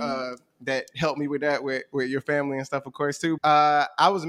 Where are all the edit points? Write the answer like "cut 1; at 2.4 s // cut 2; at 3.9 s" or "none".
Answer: cut 1; at 3.4 s